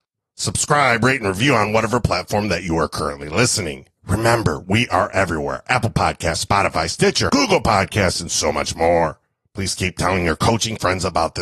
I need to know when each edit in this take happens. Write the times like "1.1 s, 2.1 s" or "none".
7.3 s